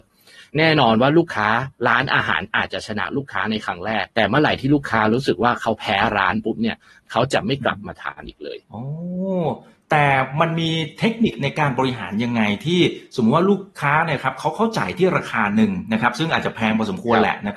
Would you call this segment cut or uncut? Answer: cut